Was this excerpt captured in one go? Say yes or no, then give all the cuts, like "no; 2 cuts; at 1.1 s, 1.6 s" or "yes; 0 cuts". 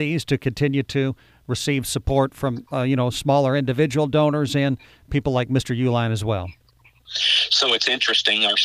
yes; 0 cuts